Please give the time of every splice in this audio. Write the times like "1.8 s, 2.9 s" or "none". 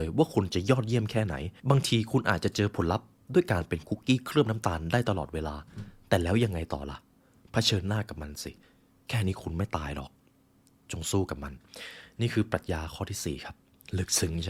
1.6 s